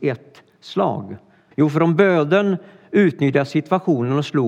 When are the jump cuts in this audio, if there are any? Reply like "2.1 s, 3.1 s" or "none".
1.5 s